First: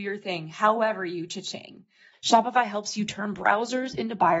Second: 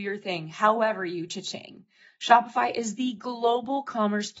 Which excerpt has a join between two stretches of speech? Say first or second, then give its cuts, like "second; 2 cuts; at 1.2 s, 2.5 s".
first; 1 cut; at 2.1 s